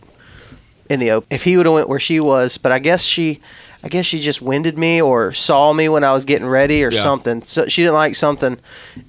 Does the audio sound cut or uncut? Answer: cut